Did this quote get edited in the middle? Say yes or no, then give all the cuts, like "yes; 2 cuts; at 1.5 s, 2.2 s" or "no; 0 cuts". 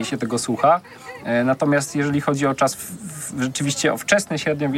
no; 0 cuts